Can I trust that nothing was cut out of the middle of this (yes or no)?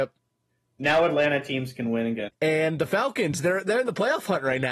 no